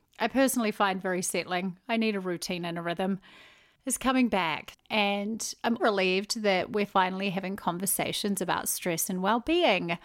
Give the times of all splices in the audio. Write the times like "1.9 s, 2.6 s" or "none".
4.7 s, 5.8 s